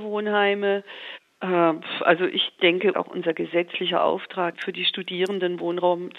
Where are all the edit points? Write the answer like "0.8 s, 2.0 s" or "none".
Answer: 1.3 s, 2.9 s, 4.5 s

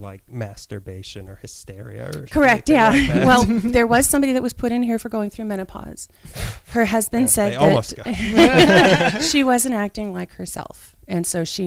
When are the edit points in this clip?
none

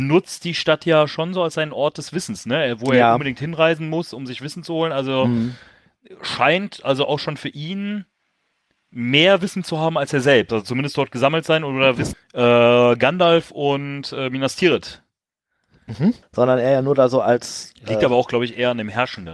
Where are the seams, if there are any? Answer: 12.1 s, 16.2 s

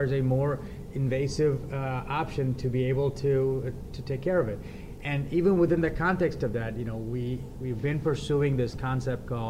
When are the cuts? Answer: none

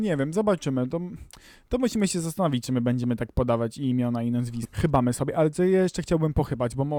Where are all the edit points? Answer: 4.6 s

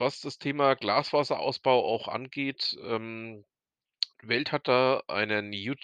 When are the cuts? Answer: 4.1 s

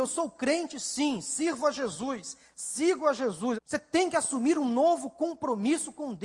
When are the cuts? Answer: 3.5 s

